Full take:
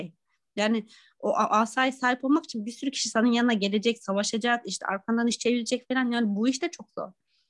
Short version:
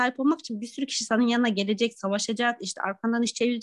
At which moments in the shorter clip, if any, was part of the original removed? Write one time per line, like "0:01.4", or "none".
none